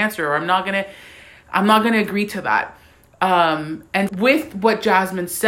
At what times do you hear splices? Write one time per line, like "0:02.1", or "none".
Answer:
0:04.1